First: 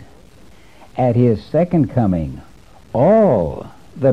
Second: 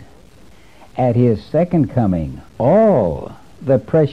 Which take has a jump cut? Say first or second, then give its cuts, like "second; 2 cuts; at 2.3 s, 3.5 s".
second; 1 cut; at 2.5 s